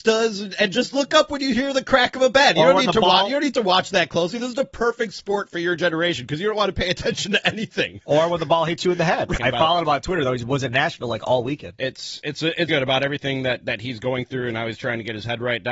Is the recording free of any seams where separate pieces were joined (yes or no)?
no